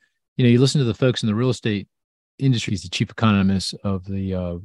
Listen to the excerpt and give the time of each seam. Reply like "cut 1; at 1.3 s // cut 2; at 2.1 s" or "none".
cut 1; at 2.7 s